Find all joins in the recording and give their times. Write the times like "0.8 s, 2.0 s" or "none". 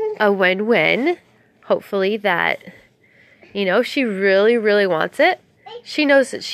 none